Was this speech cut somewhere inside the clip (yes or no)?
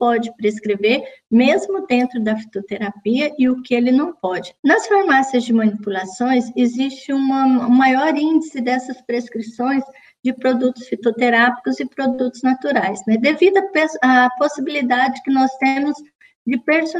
yes